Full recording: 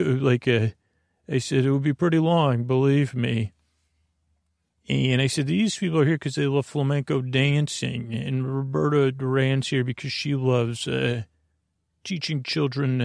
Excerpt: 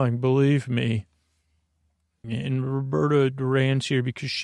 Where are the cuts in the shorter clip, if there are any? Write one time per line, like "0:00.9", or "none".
0:02.2